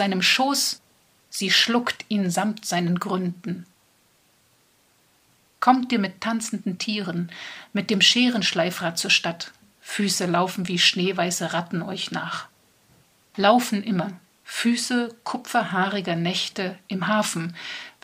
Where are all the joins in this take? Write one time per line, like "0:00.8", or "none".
0:09.6